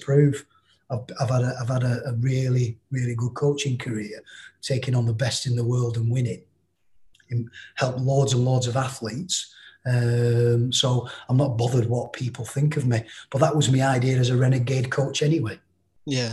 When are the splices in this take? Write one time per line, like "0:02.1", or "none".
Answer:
none